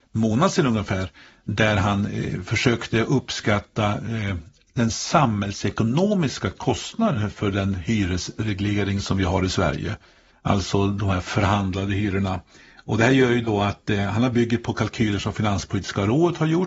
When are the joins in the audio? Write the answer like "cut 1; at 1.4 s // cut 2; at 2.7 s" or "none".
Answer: none

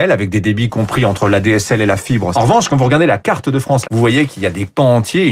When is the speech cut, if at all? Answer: cut 1; at 2.3 s // cut 2; at 3.8 s

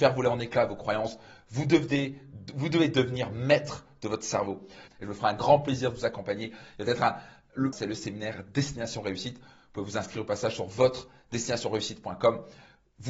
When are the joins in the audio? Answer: cut 1; at 4.9 s // cut 2; at 7.7 s

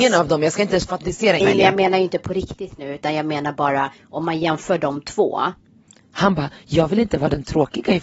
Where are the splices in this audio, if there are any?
cut 1; at 1.4 s

